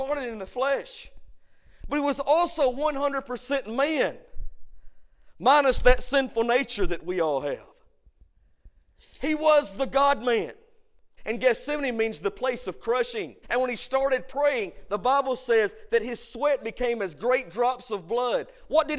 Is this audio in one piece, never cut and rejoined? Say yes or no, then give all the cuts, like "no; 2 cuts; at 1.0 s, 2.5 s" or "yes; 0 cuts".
no; 2 cuts; at 11.2 s, 13.4 s